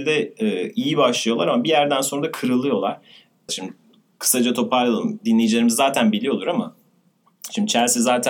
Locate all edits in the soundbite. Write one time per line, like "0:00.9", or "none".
0:03.5

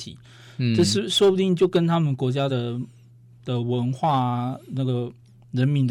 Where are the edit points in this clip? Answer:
none

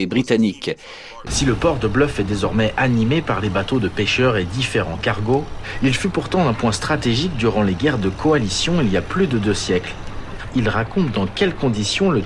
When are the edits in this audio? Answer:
0:01.3
0:10.5

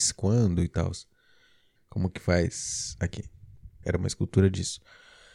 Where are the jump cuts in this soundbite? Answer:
0:01.8
0:03.8

